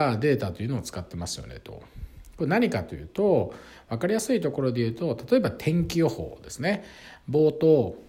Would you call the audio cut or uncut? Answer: uncut